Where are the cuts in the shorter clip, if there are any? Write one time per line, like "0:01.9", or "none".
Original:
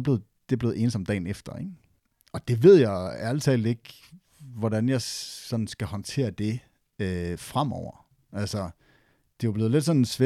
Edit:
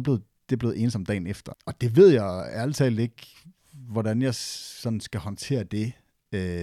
0:01.5

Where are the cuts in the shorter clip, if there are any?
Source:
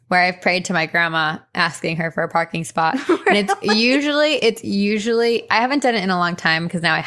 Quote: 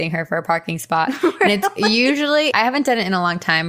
0:02.5

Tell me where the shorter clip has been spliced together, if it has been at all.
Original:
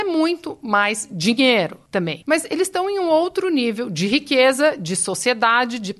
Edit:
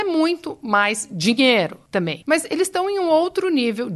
none

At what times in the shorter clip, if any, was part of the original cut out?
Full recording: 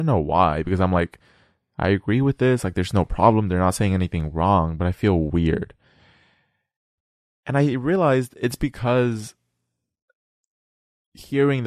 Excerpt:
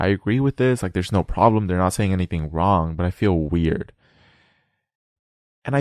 none

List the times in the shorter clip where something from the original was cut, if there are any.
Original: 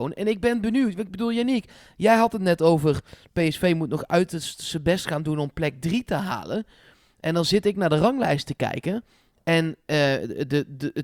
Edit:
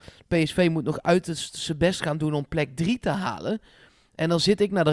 none

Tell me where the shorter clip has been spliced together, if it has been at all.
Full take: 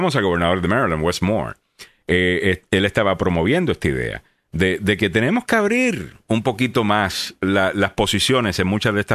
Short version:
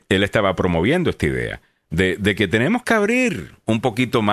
none

